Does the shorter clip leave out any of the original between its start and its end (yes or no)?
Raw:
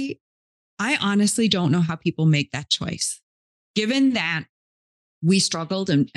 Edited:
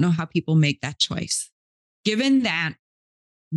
no